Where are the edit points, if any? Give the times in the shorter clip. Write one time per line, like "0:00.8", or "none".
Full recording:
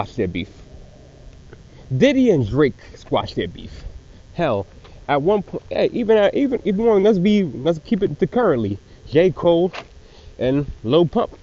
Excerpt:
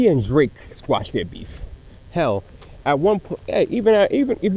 none